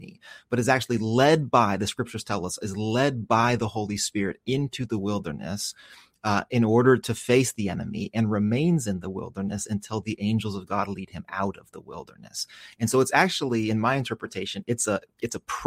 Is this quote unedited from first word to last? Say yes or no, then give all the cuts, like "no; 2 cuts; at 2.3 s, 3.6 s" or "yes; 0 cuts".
yes; 0 cuts